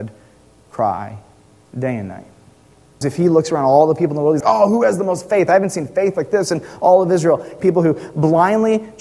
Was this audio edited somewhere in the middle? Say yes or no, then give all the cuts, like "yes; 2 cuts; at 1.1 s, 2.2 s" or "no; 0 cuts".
yes; 3 cuts; at 3.0 s, 4.4 s, 7.6 s